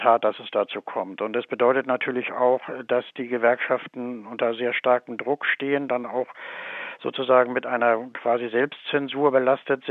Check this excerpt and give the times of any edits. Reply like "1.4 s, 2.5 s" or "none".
none